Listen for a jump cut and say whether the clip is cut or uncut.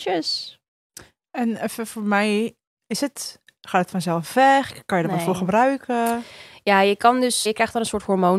cut